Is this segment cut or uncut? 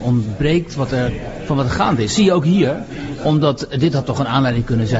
uncut